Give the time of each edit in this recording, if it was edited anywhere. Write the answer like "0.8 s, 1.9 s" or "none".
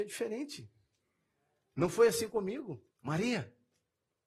2.9 s